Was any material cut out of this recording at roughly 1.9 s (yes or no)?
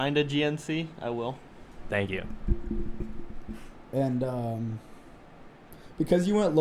yes